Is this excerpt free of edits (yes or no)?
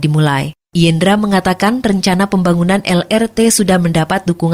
yes